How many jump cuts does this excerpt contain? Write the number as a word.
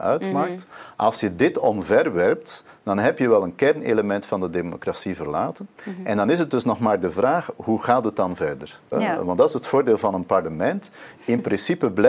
one